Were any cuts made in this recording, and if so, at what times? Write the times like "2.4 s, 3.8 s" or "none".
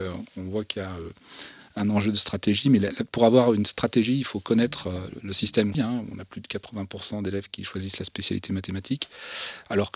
5.7 s